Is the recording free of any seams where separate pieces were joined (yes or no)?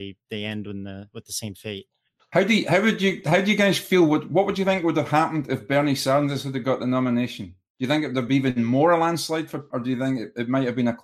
no